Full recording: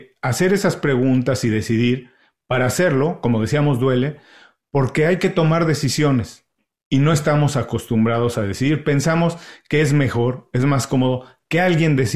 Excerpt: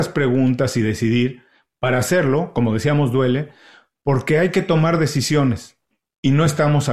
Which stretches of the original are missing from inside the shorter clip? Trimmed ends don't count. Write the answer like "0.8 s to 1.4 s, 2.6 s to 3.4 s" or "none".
none